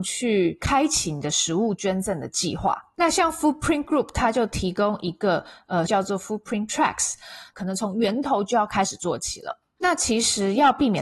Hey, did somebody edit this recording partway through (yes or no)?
yes